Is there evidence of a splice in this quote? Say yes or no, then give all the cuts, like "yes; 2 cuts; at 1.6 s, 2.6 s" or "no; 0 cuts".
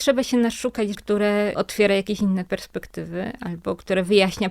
yes; 1 cut; at 0.9 s